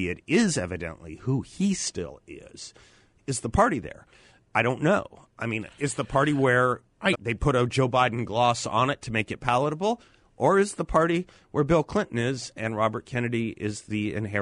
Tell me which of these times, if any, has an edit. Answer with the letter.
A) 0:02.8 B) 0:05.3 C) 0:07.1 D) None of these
C